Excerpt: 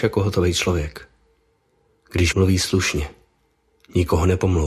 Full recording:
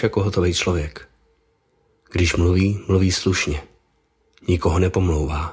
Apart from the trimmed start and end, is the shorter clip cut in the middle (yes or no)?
yes